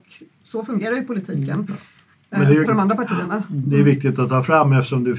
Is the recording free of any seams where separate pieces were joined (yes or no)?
no